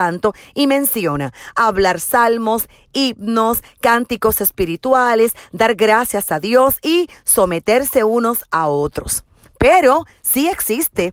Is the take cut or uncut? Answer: uncut